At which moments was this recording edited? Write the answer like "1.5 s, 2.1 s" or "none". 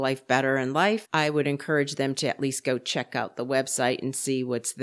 1.0 s